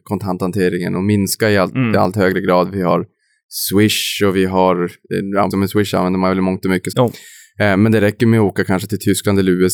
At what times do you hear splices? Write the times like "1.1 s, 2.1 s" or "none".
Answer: 5.5 s, 6.9 s